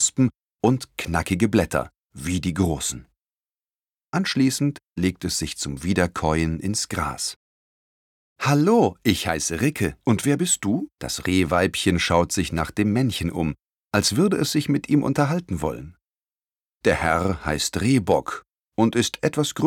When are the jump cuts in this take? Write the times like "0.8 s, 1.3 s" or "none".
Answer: 10.9 s